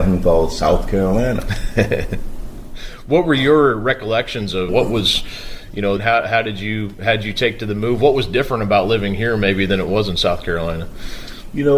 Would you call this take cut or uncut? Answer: cut